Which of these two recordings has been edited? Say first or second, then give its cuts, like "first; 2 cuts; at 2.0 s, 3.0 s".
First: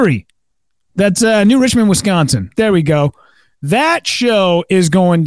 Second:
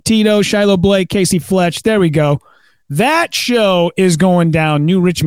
first; 1 cut; at 2.5 s